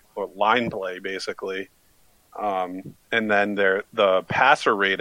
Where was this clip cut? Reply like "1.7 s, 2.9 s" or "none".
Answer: 3.0 s